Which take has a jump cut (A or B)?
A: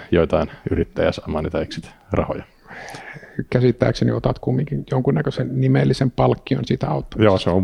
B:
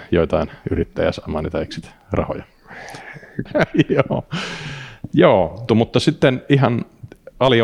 B